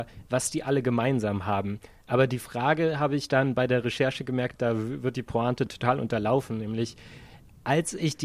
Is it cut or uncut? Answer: cut